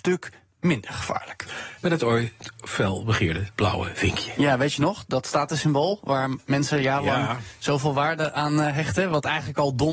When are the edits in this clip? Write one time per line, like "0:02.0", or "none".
0:01.8